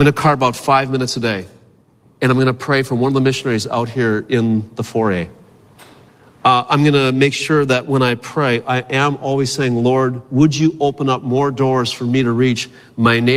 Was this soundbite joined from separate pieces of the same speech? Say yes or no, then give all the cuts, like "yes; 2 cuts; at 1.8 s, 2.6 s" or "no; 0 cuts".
no; 0 cuts